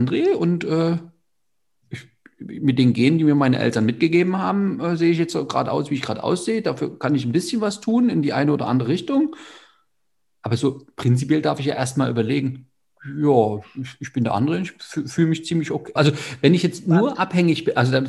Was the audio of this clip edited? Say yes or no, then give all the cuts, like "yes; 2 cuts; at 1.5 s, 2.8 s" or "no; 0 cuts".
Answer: yes; 1 cut; at 16.0 s